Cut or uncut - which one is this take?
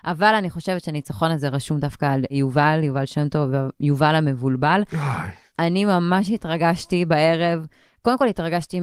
uncut